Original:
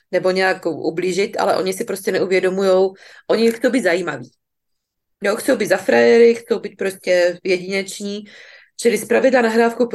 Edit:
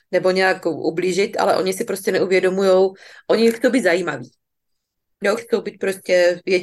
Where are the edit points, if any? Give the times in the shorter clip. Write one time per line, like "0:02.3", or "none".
0:05.4